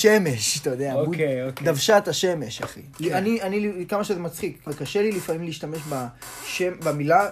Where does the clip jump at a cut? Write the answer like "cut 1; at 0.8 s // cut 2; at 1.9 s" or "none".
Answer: cut 1; at 2.9 s // cut 2; at 4.7 s